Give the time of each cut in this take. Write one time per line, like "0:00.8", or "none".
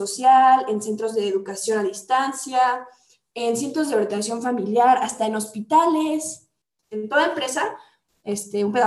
0:06.8